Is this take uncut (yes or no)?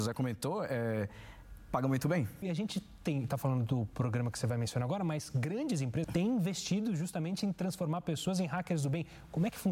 no